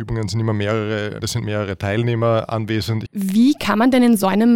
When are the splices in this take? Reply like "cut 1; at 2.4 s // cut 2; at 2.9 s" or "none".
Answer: cut 1; at 1.2 s // cut 2; at 3.1 s